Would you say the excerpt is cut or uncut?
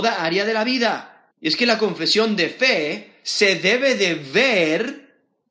cut